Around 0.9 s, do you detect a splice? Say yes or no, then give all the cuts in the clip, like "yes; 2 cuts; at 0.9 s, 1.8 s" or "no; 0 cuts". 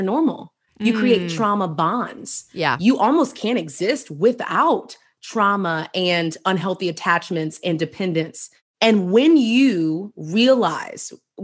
no; 0 cuts